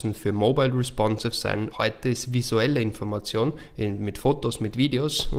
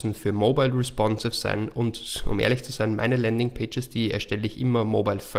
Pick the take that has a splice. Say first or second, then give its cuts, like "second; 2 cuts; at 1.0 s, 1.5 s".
first; 1 cut; at 1.7 s